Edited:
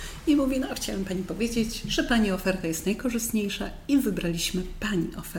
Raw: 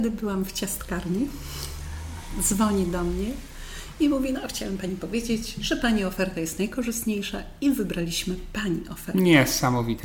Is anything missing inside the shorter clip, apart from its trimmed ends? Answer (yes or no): no